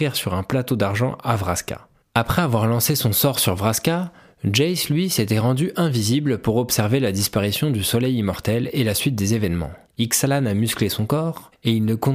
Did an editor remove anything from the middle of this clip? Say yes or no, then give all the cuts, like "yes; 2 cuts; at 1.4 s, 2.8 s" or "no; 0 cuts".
yes; 2 cuts; at 2.0 s, 9.9 s